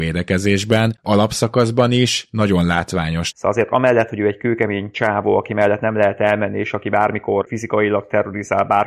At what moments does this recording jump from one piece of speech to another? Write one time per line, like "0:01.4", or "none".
0:03.3